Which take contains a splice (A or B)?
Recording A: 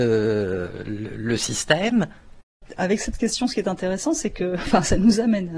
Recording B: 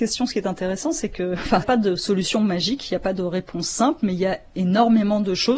B